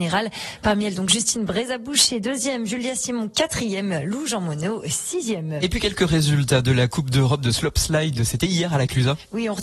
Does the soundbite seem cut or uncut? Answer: uncut